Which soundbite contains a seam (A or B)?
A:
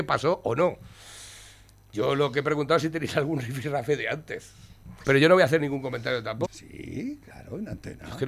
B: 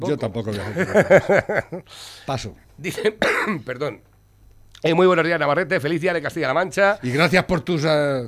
A